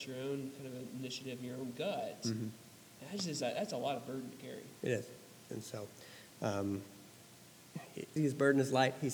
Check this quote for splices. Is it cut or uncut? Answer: cut